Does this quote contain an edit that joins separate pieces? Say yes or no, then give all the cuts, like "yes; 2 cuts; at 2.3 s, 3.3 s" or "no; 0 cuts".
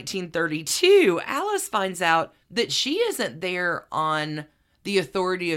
yes; 1 cut; at 2.4 s